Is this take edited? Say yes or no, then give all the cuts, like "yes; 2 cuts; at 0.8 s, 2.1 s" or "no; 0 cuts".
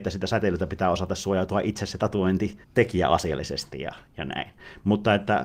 yes; 1 cut; at 2.6 s